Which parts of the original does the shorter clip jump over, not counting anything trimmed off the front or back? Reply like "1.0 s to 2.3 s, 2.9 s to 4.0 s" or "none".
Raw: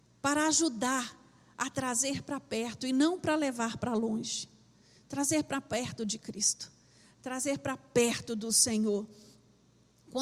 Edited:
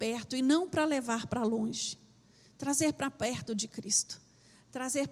none

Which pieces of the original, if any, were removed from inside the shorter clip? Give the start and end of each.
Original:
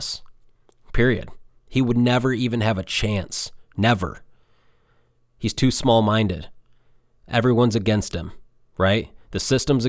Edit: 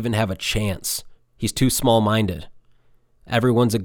3.7 s to 5.2 s

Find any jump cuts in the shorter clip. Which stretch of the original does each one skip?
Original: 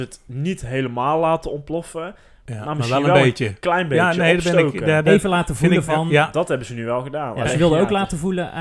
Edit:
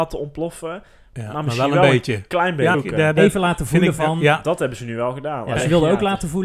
4.1 s to 4.6 s

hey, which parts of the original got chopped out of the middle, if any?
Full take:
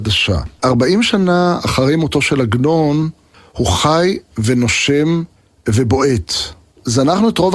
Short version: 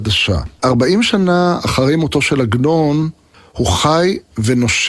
none

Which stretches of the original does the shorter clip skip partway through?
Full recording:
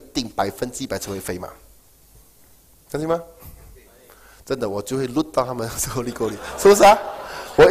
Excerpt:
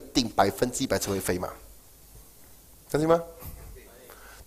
none

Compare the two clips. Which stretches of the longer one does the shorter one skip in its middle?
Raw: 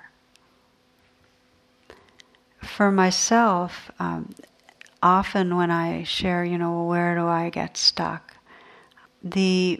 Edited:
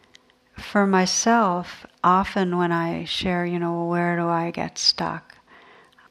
3.9 s to 4.9 s

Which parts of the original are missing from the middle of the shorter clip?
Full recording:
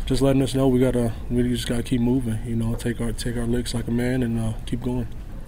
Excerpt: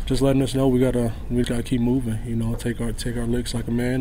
1.4 s to 1.6 s

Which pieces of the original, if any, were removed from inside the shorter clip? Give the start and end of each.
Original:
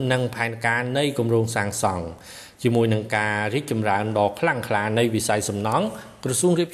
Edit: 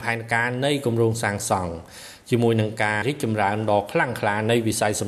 3.3 s to 3.5 s

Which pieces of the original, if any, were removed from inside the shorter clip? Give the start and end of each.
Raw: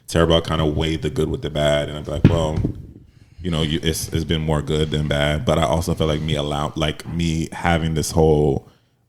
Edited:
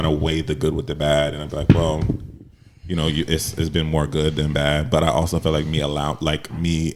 none

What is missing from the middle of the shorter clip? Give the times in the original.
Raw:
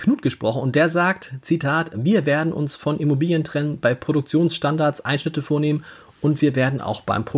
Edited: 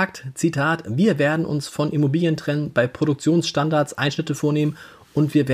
none

